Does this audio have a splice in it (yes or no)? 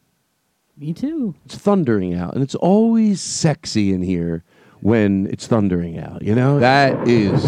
yes